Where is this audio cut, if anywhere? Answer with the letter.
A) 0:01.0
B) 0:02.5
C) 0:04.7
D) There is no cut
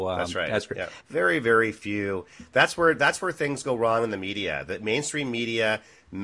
A